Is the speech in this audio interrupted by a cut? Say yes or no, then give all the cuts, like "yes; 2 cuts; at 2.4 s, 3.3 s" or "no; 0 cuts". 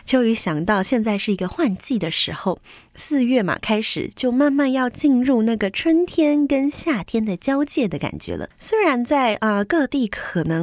no; 0 cuts